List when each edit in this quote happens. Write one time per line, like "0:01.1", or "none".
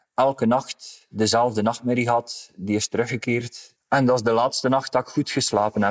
0:03.8